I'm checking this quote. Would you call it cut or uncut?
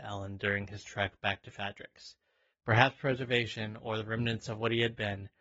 cut